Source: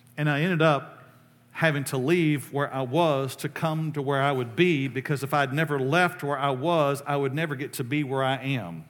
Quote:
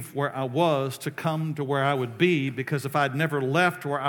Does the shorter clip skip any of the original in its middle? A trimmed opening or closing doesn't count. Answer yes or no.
no